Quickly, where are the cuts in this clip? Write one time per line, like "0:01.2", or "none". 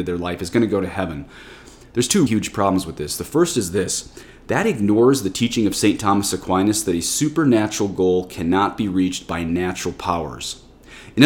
0:02.3